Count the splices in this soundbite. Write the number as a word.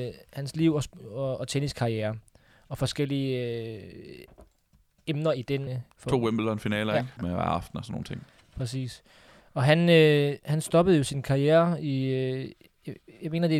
two